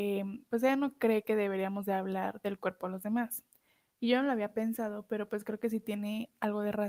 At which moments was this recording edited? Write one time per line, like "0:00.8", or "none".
none